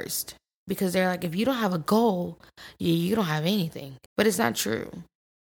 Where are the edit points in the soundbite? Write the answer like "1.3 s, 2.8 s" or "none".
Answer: 4.1 s